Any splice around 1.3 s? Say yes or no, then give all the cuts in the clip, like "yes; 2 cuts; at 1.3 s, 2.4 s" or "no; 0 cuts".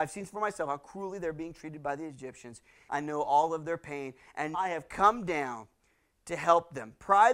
no; 2 cuts; at 2.9 s, 4.5 s